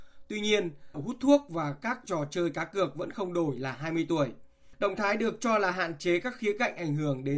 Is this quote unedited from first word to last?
no; 1 cut; at 0.9 s

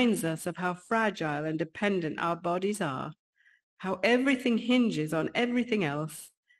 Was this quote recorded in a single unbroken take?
yes; 0 cuts

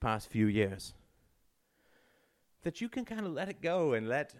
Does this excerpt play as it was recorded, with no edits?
yes; 0 cuts

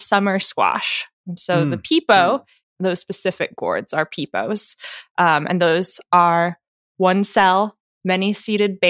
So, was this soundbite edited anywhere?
yes; 1 cut; at 2.6 s

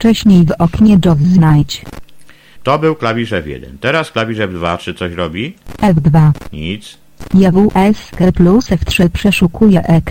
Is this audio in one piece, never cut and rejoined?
no; 1 cut; at 2.6 s

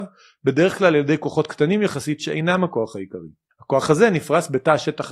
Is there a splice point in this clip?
yes; 1 cut; at 3.5 s

